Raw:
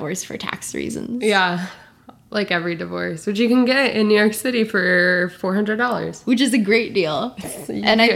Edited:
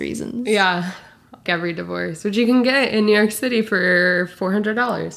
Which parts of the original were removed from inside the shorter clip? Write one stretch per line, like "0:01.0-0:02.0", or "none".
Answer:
0:02.2-0:02.5